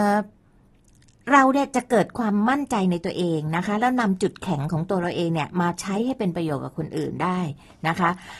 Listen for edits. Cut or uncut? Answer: uncut